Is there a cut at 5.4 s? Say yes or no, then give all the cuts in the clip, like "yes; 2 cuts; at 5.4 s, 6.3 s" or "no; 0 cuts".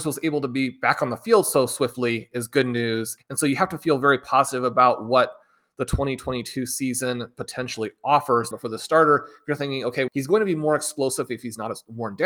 no; 3 cuts; at 3.2 s, 8.5 s, 10.1 s